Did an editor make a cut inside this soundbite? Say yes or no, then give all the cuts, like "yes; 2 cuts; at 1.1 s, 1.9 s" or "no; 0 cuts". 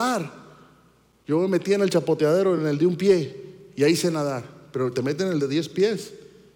no; 0 cuts